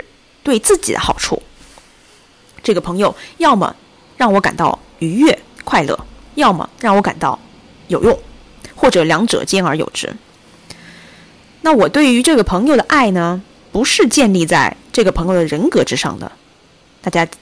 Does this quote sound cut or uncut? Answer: uncut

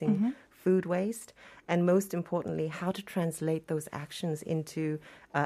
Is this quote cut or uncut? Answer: uncut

